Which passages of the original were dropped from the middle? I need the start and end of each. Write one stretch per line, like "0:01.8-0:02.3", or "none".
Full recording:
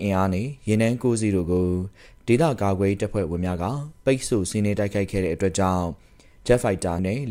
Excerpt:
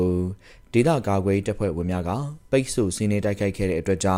none